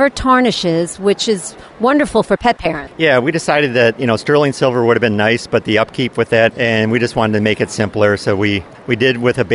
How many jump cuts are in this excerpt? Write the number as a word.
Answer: one